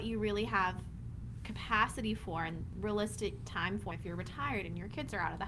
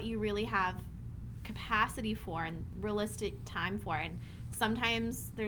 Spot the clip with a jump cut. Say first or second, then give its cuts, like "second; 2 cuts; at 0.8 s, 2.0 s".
first; 1 cut; at 3.9 s